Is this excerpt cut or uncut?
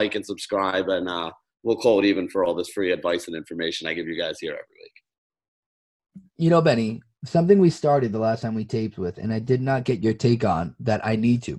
uncut